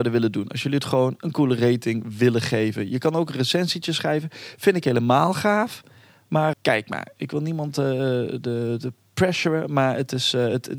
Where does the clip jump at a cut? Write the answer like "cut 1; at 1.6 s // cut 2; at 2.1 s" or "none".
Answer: cut 1; at 6.5 s